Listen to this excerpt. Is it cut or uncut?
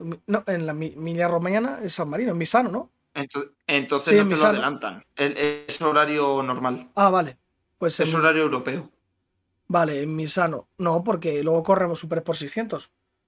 uncut